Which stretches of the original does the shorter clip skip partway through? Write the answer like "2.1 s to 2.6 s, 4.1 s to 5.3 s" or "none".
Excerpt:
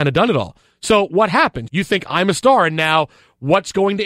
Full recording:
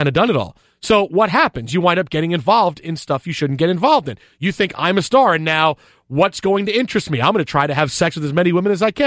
1.7 s to 4.4 s